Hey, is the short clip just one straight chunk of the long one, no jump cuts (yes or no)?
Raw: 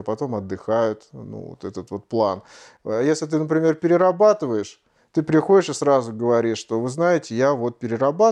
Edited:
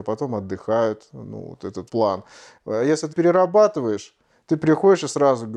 no